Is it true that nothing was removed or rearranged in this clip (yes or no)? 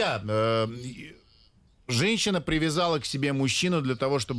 yes